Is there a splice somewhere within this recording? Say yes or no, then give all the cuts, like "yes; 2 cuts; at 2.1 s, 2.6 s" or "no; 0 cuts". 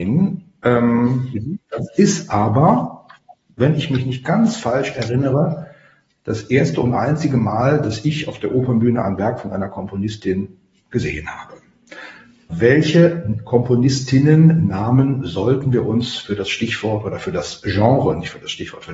yes; 1 cut; at 12.5 s